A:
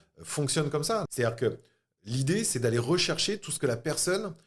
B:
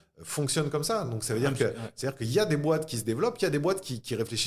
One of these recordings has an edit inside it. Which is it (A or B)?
A